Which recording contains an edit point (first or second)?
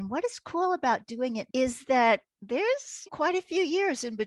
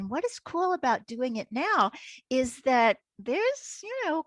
first